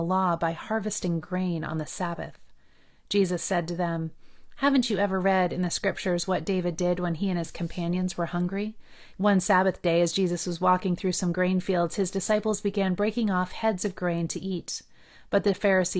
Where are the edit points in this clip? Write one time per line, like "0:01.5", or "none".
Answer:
0:09.1

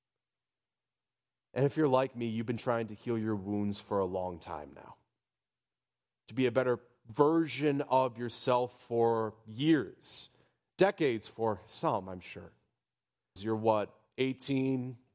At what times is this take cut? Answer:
0:13.4

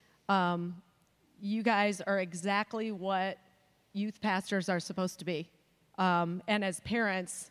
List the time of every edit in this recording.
0:05.9

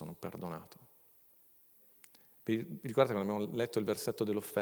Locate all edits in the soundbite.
none

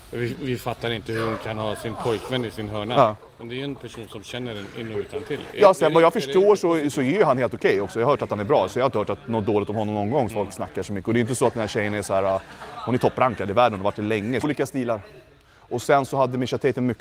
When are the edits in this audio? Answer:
0:10.3
0:14.4

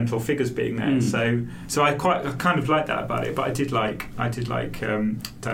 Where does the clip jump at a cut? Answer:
none

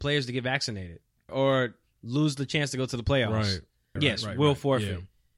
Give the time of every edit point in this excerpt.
0:01.3
0:04.0

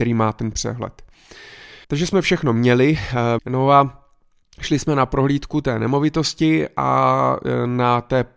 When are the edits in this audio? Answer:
0:01.8
0:03.4

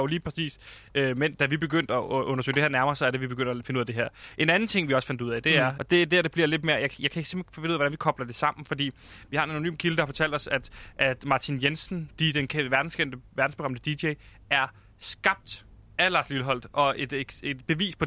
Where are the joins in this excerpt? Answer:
0:05.8

